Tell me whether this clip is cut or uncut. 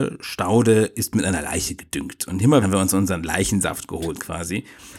cut